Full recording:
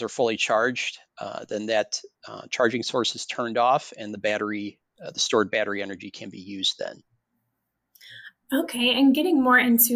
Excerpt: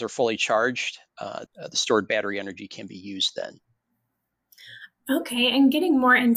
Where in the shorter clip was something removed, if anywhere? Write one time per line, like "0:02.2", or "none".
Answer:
0:01.5